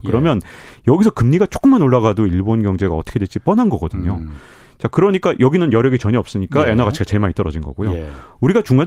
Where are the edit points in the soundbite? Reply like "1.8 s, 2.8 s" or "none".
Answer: none